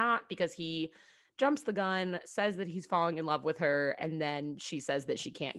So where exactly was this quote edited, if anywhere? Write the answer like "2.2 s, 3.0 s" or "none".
none